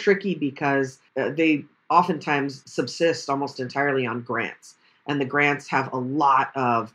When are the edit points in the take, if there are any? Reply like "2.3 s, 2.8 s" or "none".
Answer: 1.1 s